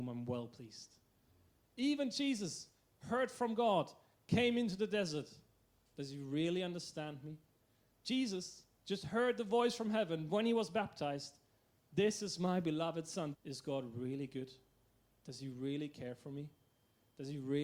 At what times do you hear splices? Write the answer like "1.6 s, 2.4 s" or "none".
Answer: 5.9 s, 7.8 s, 13.3 s